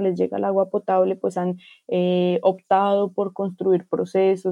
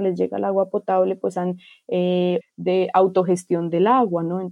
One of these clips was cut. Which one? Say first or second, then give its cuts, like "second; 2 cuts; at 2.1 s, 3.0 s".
second; 1 cut; at 2.4 s